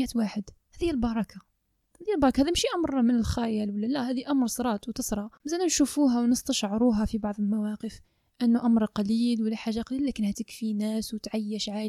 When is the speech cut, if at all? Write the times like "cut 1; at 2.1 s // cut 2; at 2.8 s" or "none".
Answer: cut 1; at 10.3 s